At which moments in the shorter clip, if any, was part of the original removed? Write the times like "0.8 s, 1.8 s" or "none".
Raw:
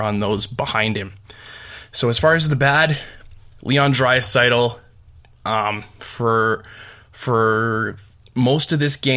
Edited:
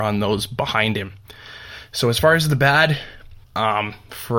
3.4 s